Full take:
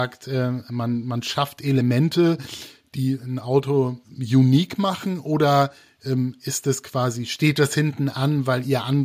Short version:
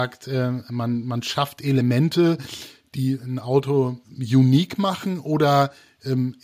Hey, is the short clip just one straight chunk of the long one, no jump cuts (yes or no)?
yes